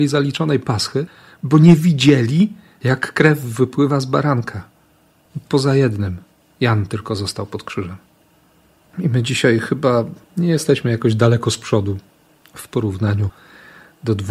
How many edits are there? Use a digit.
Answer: 1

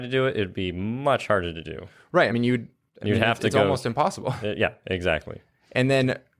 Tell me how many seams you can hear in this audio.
0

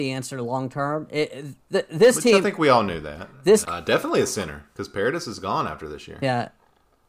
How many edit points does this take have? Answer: 2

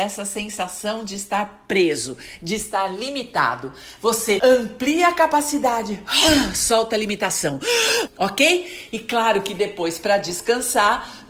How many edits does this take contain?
2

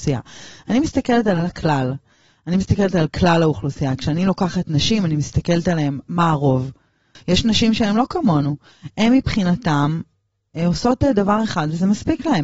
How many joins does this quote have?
1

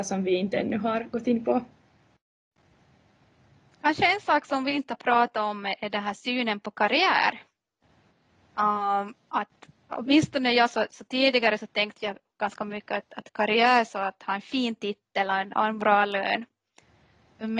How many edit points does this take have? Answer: 1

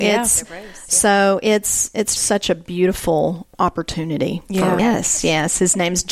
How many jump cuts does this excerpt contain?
2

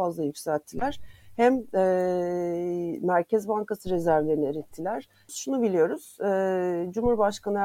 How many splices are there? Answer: 1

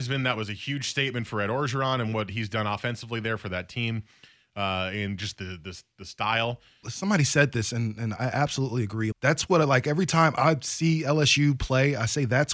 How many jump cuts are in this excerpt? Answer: 2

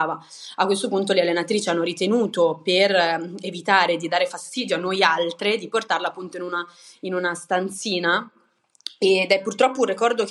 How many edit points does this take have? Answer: 0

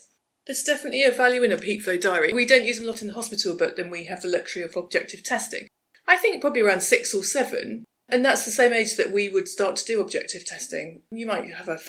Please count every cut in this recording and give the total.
0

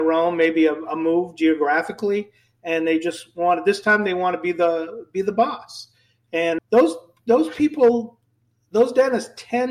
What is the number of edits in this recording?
1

